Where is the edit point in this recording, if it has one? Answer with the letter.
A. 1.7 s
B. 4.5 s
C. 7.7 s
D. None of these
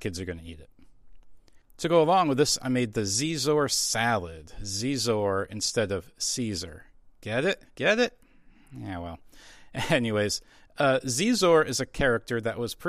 C